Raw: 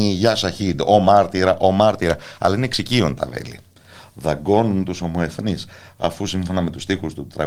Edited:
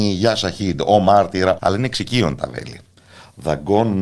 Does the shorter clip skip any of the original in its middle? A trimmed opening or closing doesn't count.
yes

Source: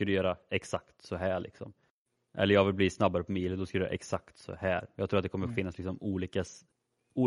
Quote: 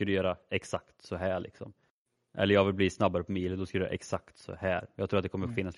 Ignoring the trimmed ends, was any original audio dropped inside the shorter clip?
no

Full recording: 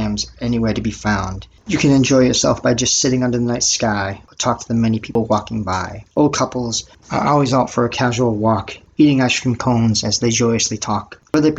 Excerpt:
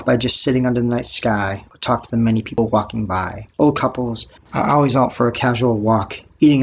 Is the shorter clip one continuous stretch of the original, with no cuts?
yes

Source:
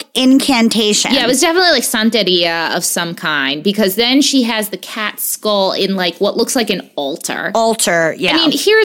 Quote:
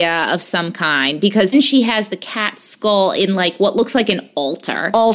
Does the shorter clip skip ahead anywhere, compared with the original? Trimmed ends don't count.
yes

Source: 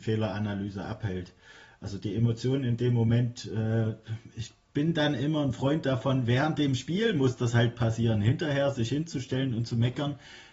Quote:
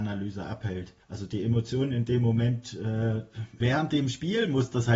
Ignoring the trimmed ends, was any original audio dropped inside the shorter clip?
yes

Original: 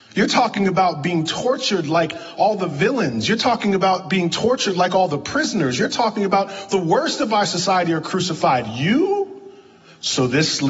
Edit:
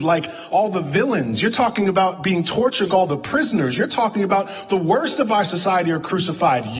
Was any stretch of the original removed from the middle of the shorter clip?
yes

